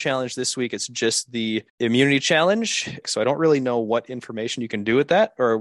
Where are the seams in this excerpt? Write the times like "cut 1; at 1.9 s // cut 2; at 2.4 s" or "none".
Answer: cut 1; at 1.7 s // cut 2; at 3.0 s